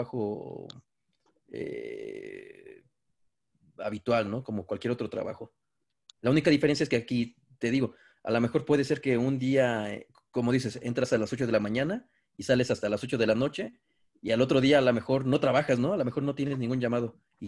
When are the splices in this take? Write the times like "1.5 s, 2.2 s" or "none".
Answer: none